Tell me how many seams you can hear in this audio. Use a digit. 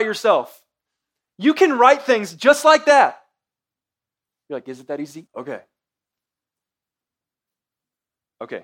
1